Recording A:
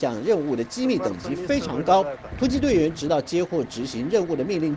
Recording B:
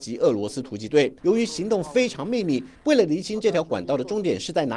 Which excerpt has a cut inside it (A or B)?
B